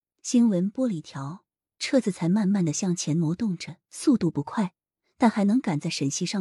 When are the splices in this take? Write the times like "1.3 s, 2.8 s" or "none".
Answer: none